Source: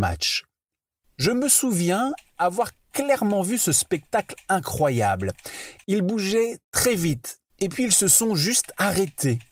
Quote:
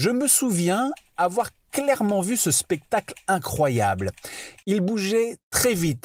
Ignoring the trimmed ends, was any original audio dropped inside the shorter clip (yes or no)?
no